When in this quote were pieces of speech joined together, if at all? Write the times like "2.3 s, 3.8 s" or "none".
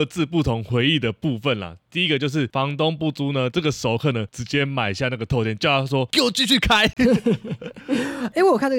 3.5 s